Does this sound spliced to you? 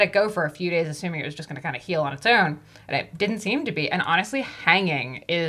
no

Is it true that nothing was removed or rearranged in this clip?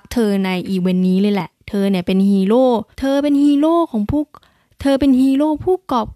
no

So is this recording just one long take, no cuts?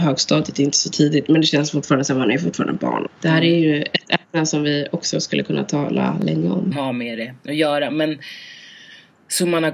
no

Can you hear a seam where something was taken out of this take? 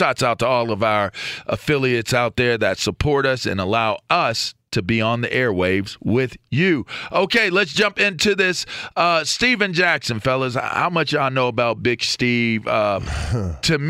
no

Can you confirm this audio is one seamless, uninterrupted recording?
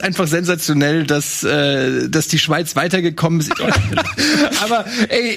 no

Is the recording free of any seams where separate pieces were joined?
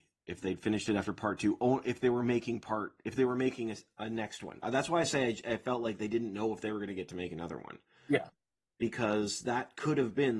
yes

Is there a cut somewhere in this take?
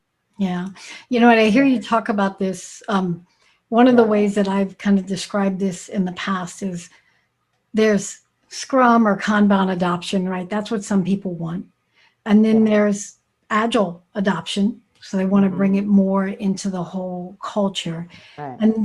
no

